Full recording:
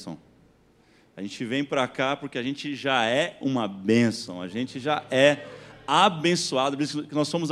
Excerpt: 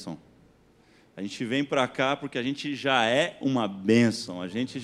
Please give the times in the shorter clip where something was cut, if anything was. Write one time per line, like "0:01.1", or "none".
none